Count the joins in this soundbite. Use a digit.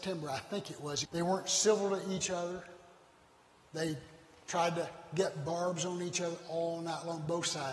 1